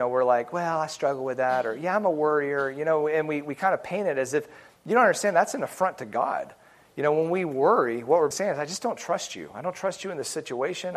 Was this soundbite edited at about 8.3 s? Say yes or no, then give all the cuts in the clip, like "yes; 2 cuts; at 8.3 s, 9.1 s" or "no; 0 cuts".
yes; 1 cut; at 8.3 s